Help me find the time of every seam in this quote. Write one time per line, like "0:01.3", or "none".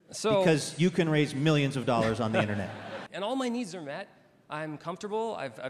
0:03.1